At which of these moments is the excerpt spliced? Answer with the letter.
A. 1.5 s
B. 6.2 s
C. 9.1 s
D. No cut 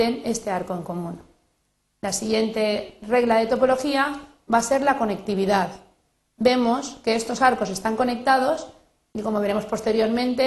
D